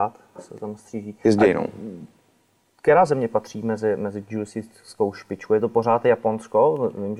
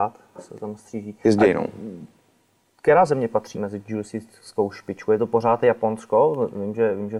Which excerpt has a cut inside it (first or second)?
second